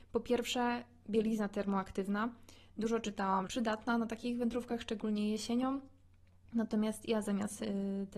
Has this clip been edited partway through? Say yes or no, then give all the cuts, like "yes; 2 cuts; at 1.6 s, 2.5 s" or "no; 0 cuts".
yes; 1 cut; at 3.5 s